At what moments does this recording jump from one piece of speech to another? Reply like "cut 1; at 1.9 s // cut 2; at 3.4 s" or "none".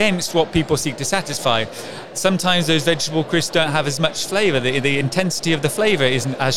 none